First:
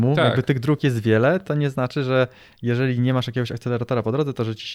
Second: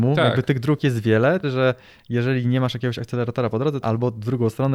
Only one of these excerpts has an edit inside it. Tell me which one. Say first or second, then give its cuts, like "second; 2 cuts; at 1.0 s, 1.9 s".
second; 2 cuts; at 1.4 s, 3.8 s